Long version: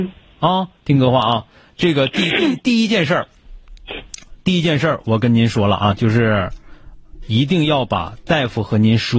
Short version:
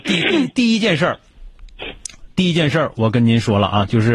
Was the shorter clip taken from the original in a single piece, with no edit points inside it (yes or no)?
yes